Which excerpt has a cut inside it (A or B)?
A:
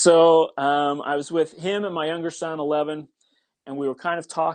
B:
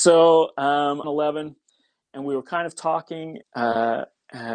B